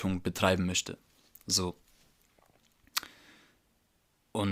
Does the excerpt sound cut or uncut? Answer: uncut